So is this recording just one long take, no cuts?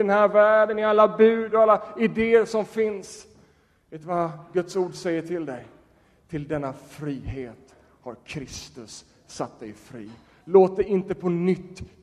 yes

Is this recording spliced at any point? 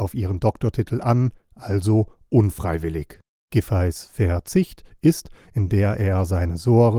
yes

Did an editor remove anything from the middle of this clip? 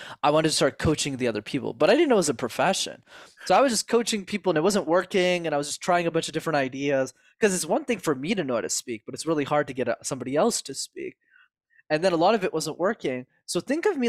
no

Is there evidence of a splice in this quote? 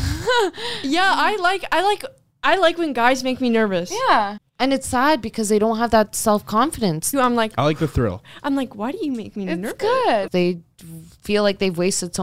yes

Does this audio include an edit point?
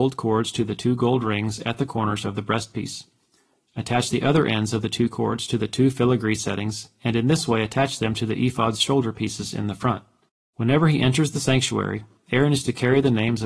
yes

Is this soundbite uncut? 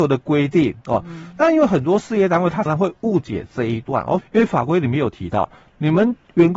no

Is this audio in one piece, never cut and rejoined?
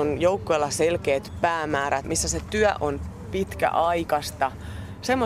yes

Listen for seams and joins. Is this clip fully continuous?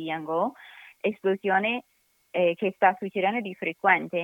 yes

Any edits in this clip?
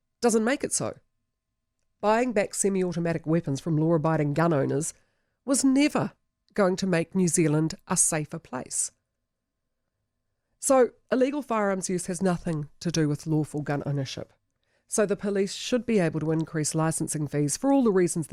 no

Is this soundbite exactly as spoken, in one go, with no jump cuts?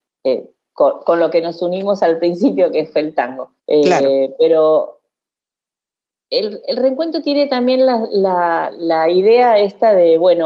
no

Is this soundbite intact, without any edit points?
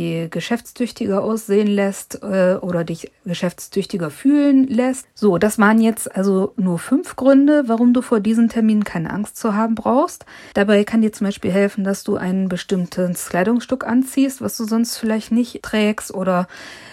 no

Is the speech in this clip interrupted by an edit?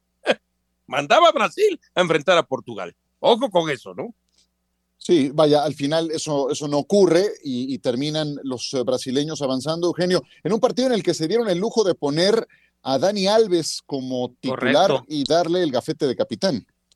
no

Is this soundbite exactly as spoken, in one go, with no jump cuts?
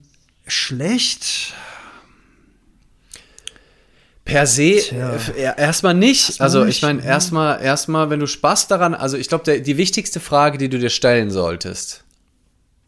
yes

